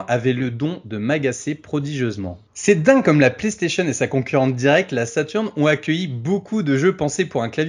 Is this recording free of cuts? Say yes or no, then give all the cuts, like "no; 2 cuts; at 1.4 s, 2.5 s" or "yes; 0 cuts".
no; 1 cut; at 2.5 s